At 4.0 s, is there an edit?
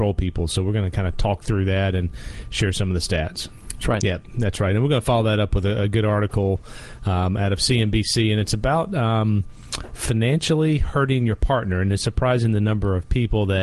yes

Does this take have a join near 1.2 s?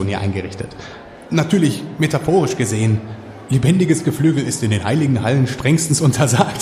yes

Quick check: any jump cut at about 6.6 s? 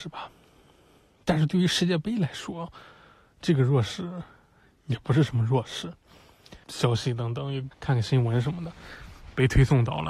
yes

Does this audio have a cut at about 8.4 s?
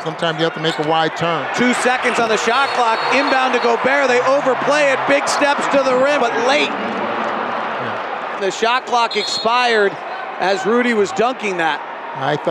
yes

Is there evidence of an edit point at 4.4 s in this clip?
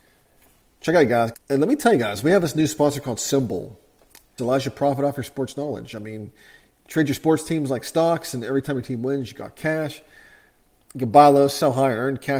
yes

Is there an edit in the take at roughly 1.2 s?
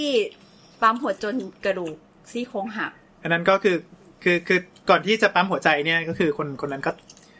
yes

